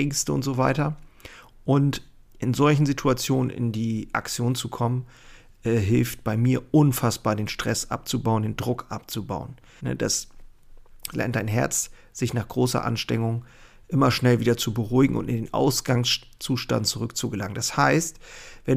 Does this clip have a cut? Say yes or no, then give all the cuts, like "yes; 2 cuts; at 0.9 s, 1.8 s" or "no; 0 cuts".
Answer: yes; 2 cuts; at 9.8 s, 11.1 s